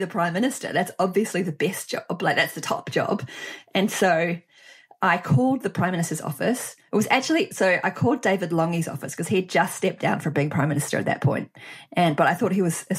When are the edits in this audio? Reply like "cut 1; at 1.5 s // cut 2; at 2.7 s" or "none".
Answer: none